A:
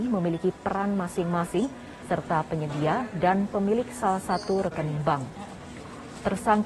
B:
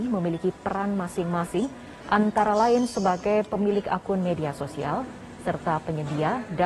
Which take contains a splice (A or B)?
A